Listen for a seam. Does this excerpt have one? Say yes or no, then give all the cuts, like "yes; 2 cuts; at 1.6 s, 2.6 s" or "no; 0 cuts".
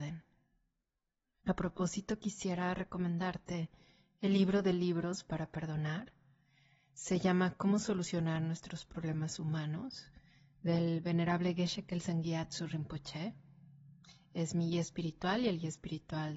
yes; 1 cut; at 1.4 s